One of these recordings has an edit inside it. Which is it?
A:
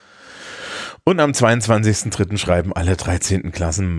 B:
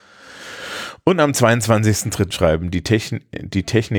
B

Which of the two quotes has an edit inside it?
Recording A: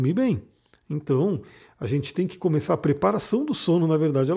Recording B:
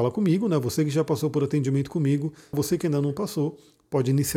B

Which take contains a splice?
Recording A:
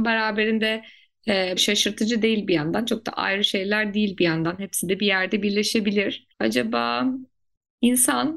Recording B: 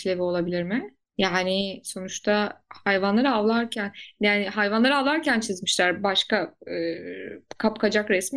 A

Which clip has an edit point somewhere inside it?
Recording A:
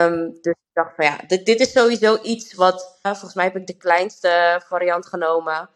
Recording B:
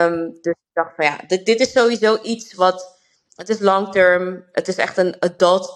A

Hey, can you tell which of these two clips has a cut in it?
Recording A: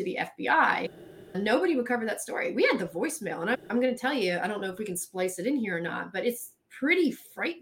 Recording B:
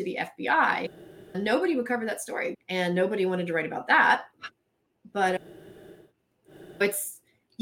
B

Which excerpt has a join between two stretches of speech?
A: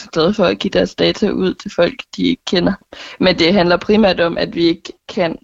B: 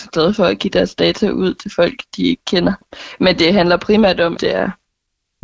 B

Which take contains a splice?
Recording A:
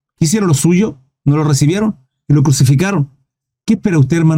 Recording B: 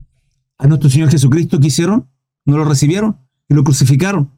B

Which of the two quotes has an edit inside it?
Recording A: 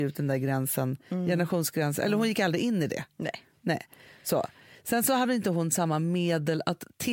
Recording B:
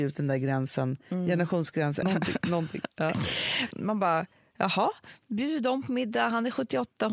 B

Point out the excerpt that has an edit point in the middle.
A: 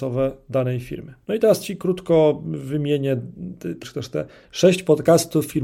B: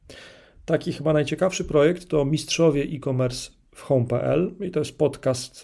A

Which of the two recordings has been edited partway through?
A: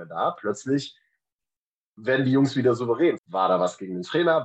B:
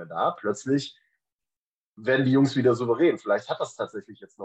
A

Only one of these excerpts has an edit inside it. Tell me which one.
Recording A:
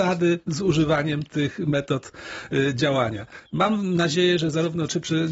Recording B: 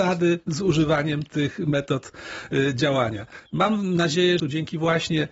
B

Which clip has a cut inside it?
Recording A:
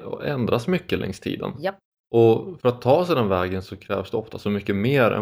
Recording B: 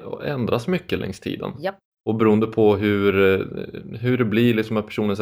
A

